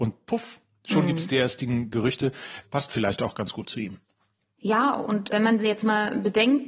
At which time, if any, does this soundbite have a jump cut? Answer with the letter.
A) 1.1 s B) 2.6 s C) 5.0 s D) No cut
B